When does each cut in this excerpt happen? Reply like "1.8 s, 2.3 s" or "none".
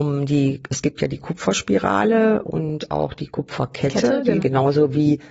4.4 s